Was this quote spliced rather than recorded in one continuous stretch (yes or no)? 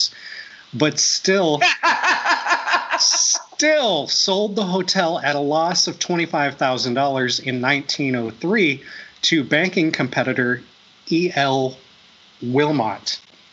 no